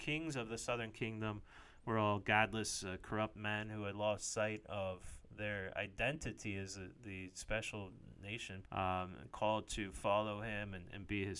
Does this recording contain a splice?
yes; 1 cut; at 8.6 s

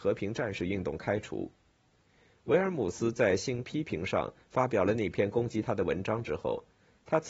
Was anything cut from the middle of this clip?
no; 0 cuts

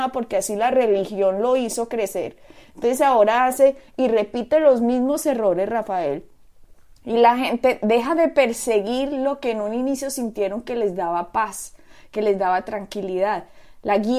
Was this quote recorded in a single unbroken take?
yes; 0 cuts

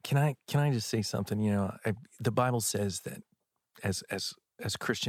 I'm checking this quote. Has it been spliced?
no; 0 cuts

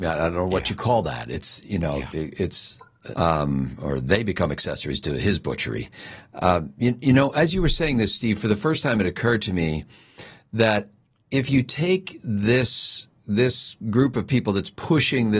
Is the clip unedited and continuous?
no; 1 cut; at 3.1 s

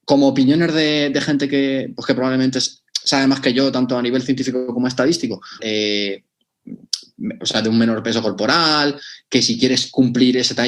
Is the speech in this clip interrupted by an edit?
yes; 1 cut; at 5.6 s

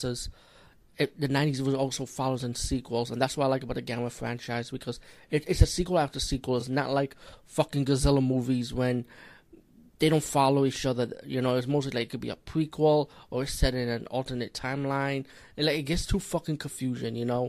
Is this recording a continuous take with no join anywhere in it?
yes; 0 cuts

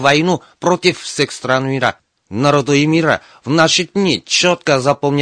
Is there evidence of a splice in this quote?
yes; 1 cut; at 2.2 s

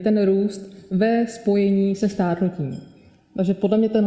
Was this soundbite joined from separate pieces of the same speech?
no; 0 cuts

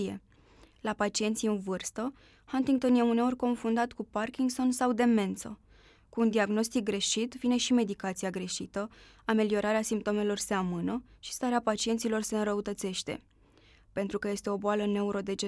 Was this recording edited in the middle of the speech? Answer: no; 0 cuts

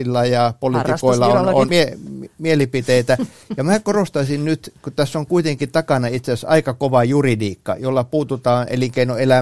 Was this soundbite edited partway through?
yes; 1 cut; at 1.7 s

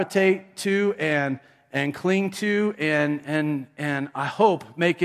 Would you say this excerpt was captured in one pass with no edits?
yes; 0 cuts

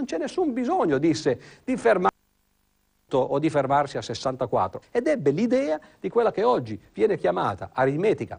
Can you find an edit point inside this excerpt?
yes; 1 cut; at 4.8 s

